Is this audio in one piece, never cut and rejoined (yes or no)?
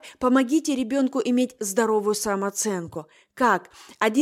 yes